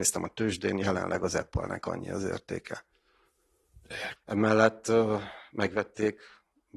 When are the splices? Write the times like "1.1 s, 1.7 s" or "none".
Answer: 4.2 s